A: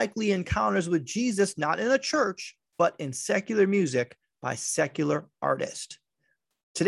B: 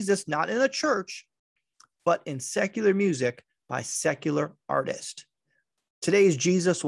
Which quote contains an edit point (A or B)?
A